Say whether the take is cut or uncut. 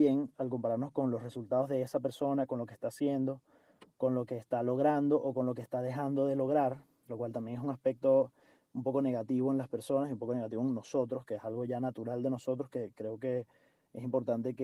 uncut